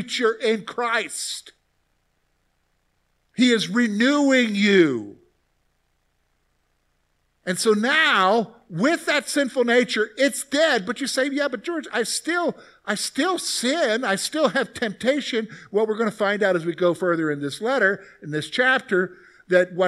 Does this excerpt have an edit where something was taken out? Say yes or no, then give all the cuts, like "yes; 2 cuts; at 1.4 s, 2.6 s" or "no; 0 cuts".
no; 0 cuts